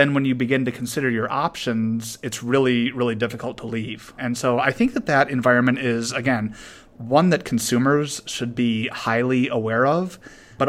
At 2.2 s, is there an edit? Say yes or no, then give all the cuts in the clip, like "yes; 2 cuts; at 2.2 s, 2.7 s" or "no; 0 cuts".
no; 0 cuts